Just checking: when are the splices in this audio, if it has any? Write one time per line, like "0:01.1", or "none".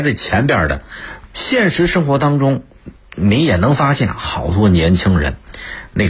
0:01.3